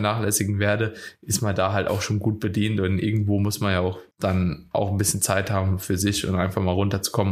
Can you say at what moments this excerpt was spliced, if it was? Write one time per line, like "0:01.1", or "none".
0:04.1